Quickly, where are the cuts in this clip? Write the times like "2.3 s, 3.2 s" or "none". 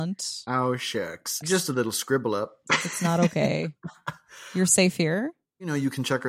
1.4 s, 2.7 s